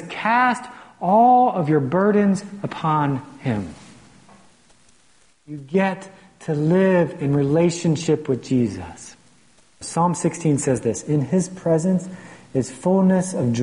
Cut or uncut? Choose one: cut